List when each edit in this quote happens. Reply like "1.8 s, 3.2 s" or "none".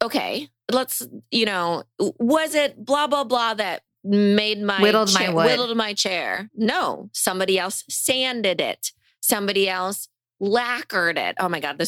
none